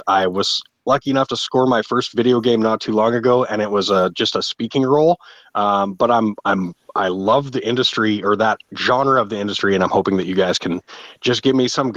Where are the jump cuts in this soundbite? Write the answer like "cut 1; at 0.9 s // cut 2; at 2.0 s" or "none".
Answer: none